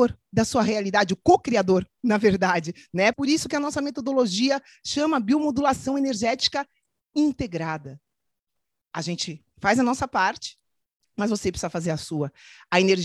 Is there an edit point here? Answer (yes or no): yes